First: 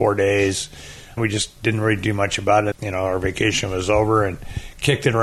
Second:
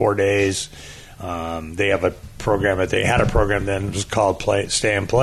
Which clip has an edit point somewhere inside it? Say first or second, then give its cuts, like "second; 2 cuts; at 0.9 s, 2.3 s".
first; 2 cuts; at 1.2 s, 2.7 s